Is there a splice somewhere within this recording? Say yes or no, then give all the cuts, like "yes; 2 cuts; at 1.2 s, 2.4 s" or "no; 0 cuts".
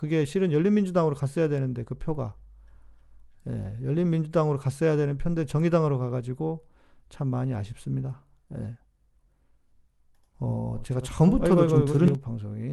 no; 0 cuts